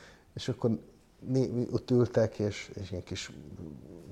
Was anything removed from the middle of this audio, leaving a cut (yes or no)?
no